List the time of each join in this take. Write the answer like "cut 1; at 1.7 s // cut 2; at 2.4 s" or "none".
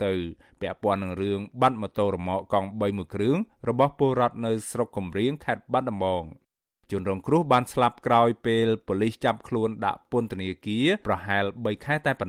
cut 1; at 11.0 s